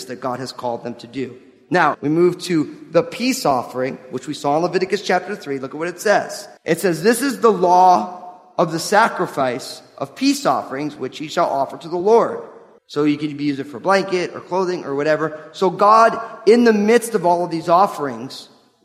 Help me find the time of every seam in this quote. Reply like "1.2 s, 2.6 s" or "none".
1.9 s, 6.6 s, 12.8 s